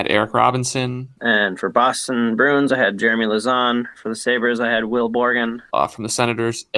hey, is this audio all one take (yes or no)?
no